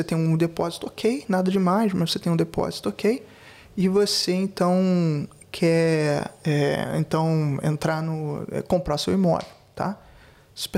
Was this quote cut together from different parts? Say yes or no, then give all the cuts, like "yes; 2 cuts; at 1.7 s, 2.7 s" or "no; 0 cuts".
no; 0 cuts